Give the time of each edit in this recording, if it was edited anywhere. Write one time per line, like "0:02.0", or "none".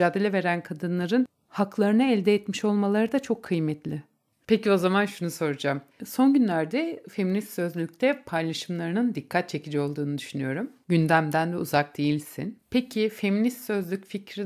none

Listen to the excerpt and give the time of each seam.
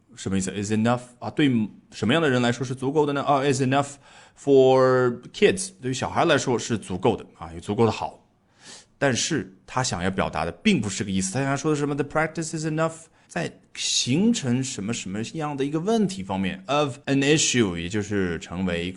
0:13.3
0:17.0

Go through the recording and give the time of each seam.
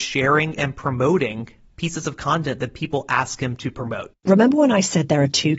0:04.1

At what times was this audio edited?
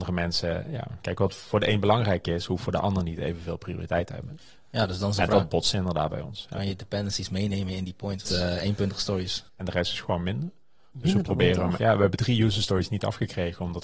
0:08.3
0:09.5
0:11.8

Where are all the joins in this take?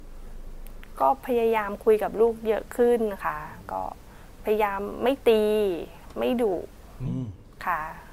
none

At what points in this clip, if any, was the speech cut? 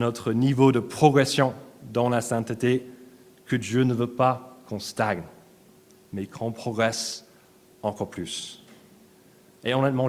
none

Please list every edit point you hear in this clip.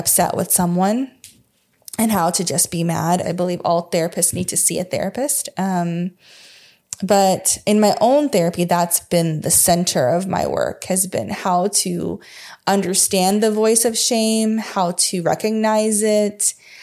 0:03.2

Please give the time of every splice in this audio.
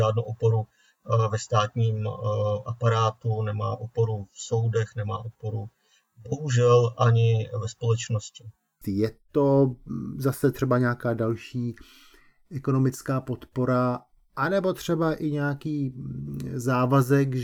0:08.8

